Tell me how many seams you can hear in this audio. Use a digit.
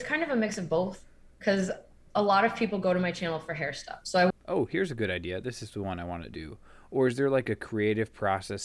1